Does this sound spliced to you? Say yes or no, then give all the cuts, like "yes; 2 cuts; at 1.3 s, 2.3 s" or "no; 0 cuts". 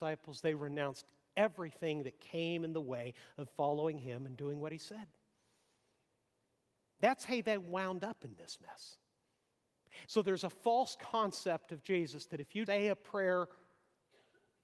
yes; 2 cuts; at 10.1 s, 12.7 s